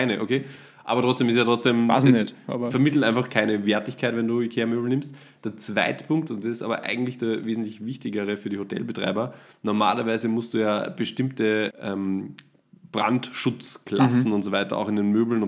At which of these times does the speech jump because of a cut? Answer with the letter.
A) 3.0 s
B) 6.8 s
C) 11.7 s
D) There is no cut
C